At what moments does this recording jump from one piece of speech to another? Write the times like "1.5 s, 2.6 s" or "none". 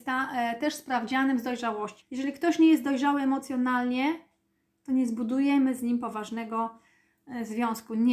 2.0 s